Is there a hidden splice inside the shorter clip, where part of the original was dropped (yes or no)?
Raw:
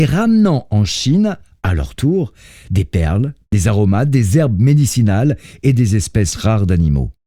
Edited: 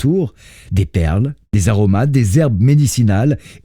no